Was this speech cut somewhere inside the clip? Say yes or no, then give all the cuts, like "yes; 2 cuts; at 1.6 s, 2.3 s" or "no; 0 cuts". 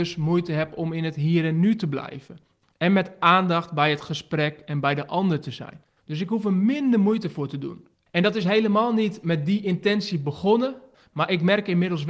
yes; 2 cuts; at 6.0 s, 8.0 s